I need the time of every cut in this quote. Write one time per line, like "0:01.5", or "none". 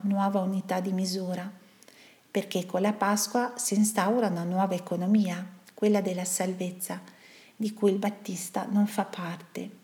none